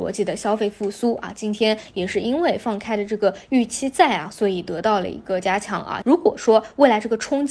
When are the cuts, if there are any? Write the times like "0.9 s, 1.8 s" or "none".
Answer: 6.0 s